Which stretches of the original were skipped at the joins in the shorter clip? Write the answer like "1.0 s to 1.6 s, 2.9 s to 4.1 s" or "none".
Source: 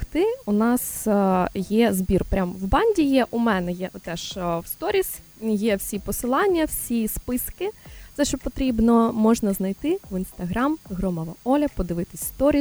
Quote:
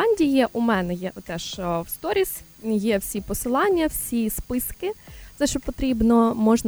none